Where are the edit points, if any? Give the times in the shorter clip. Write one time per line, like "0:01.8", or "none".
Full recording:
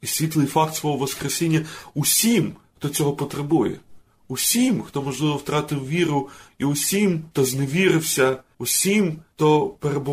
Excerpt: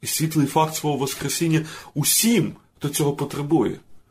none